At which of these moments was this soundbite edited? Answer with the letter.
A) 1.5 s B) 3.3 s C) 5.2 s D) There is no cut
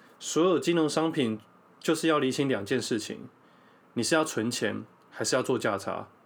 D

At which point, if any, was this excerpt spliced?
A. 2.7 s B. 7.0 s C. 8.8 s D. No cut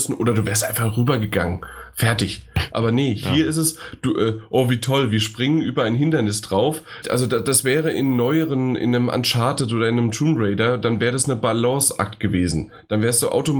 B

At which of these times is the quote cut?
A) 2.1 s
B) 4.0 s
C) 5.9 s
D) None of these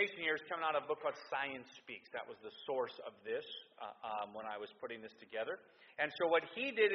C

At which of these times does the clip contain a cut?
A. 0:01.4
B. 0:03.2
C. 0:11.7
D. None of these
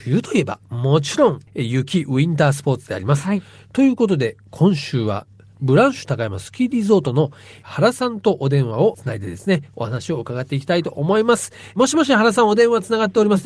D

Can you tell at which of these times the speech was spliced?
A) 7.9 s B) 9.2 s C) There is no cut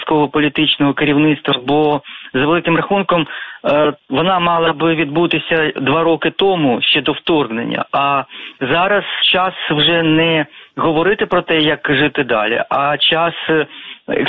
B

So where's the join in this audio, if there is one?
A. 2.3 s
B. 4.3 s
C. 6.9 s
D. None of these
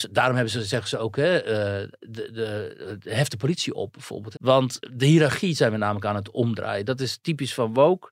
B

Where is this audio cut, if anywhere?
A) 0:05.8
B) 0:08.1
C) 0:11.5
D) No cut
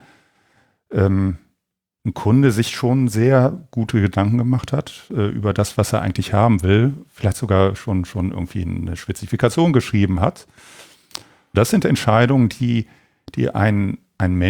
C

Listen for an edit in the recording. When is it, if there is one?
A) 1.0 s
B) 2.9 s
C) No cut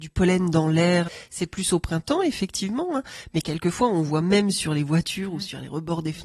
A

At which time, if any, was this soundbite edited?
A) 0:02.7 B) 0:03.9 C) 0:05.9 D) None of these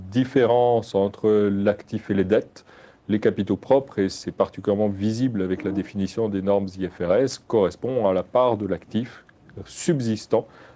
D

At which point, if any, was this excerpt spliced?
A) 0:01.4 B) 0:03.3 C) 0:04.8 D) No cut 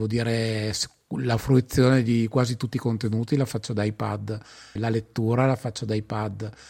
C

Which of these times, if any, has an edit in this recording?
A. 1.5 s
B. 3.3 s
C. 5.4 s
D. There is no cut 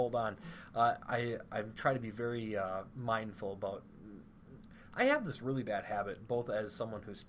D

